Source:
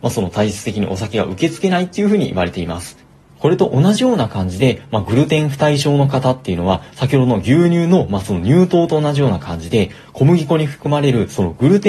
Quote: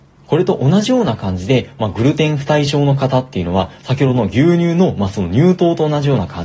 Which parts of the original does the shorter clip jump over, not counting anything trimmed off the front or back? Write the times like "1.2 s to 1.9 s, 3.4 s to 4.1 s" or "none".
none